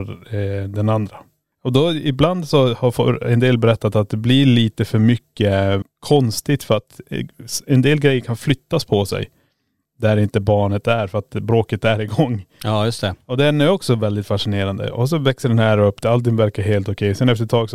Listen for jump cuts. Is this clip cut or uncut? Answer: cut